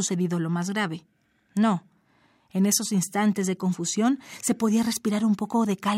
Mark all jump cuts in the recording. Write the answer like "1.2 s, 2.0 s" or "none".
none